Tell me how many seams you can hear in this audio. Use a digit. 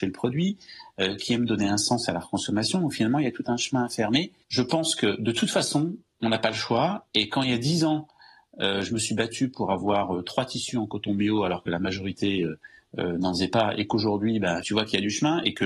2